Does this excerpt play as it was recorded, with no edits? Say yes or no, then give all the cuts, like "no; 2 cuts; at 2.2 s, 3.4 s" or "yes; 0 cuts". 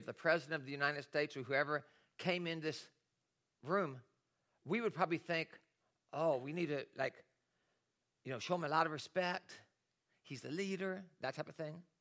yes; 0 cuts